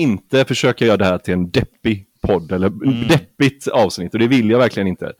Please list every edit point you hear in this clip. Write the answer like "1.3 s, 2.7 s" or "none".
none